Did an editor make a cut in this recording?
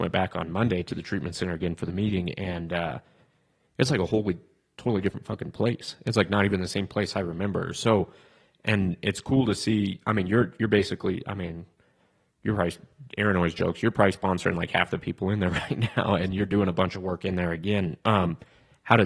no; 0 cuts

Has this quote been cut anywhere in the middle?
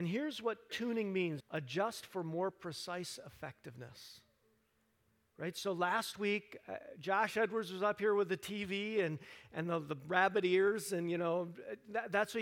yes; 1 cut; at 1.4 s

